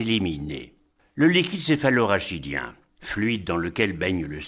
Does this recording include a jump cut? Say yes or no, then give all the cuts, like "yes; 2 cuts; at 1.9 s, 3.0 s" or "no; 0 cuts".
yes; 1 cut; at 1.0 s